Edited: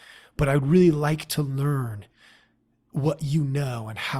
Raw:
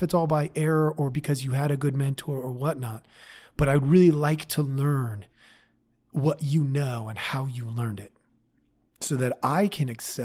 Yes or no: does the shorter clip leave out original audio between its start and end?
no